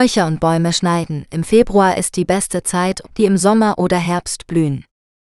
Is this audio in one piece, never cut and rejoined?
no; 1 cut; at 3.0 s

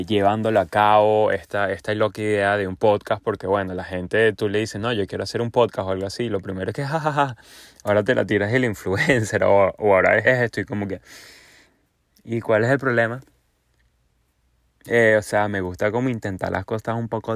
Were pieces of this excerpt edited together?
yes; 1 cut; at 10.2 s

